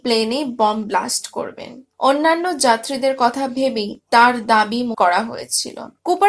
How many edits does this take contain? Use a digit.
1